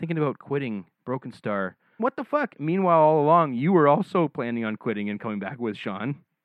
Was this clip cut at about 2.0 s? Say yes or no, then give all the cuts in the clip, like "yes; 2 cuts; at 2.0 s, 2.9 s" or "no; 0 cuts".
yes; 1 cut; at 2.0 s